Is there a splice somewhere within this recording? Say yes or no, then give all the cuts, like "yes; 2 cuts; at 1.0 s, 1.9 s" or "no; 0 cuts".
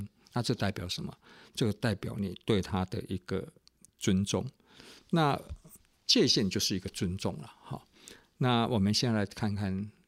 no; 0 cuts